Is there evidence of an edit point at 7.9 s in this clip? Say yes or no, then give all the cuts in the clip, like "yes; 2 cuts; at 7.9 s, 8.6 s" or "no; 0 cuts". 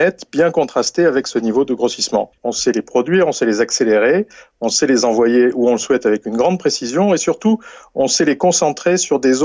no; 1 cut; at 2.4 s